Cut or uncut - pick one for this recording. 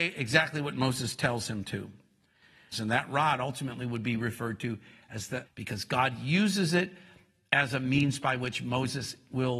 cut